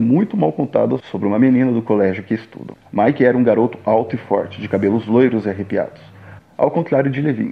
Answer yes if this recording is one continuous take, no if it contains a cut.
no